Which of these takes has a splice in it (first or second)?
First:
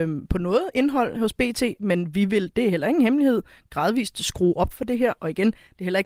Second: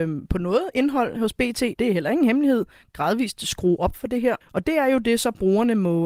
second